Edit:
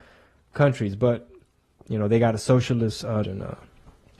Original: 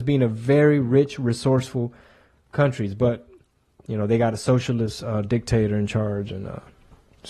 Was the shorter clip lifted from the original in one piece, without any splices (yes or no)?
no